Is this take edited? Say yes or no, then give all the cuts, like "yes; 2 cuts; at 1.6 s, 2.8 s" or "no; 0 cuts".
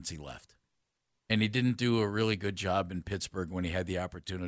no; 0 cuts